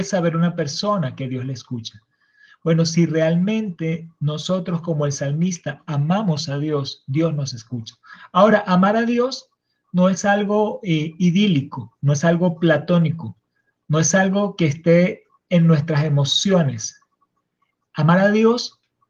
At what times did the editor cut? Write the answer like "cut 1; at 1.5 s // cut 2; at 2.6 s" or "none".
none